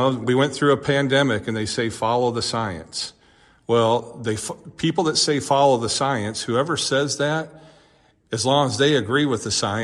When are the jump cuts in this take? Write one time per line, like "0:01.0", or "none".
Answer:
none